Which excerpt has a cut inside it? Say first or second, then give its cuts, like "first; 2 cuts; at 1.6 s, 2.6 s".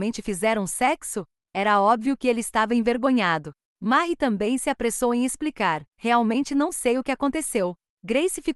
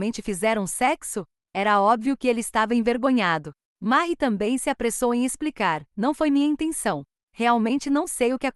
first; 1 cut; at 5.9 s